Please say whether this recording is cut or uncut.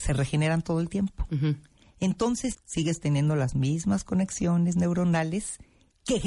cut